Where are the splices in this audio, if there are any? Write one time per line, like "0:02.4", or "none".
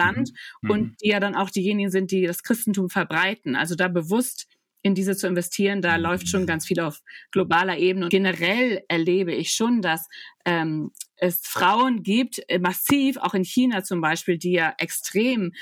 0:08.1